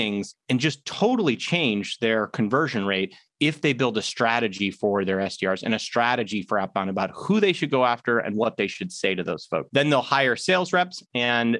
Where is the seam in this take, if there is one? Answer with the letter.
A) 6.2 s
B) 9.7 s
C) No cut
B